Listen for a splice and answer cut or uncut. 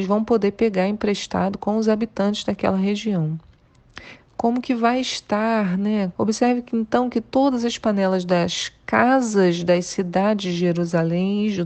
cut